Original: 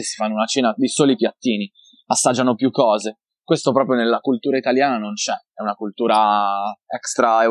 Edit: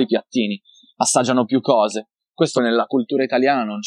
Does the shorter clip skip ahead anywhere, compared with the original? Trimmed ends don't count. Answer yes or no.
yes